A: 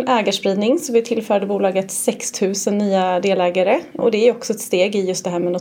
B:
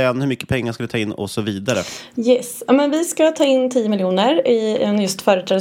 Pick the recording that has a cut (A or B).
A